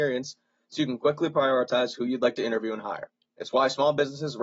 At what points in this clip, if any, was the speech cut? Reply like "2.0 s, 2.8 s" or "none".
3.3 s